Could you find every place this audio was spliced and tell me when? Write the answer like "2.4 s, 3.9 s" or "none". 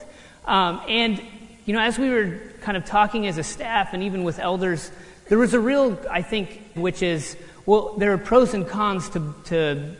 6.8 s